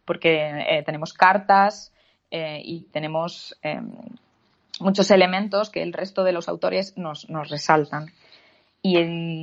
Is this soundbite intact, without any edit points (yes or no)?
yes